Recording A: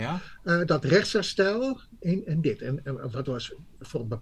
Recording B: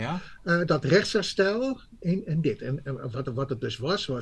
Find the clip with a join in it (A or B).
A